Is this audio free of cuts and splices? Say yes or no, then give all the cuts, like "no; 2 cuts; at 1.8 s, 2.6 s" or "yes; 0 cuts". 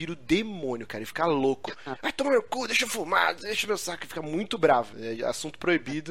yes; 0 cuts